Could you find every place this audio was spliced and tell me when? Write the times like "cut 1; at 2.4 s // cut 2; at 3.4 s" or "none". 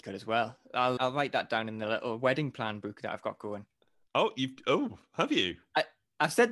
cut 1; at 1.0 s